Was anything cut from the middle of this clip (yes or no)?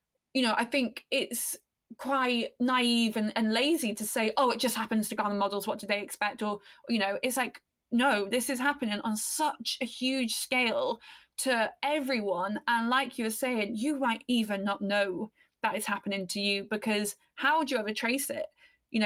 no